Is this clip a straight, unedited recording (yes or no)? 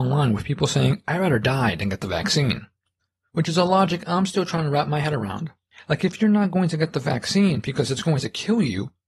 yes